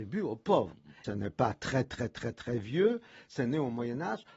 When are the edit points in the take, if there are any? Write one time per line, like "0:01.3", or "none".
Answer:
0:01.0